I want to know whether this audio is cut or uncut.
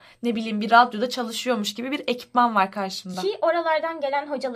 uncut